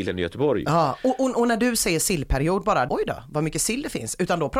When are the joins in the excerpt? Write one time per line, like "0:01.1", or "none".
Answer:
0:02.9

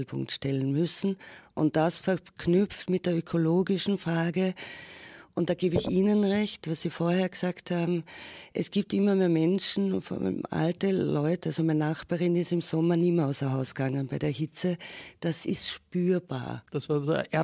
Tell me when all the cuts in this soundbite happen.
none

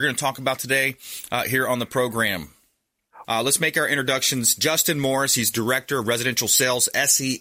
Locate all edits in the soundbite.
0:03.2

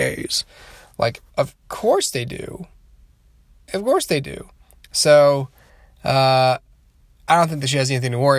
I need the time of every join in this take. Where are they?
none

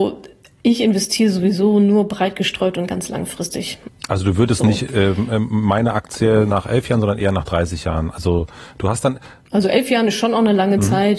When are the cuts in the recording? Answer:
0:03.9

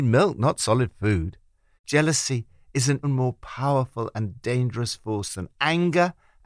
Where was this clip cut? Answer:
0:01.8
0:03.0

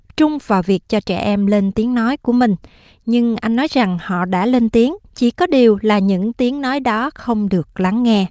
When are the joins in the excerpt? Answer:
0:05.1

